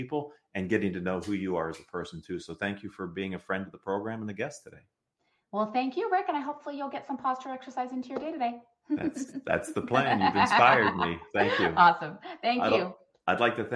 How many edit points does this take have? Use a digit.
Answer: 0